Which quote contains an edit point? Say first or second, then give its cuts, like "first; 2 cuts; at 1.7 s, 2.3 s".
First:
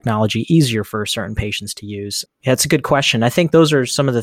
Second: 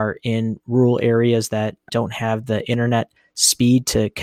first; 1 cut; at 2.3 s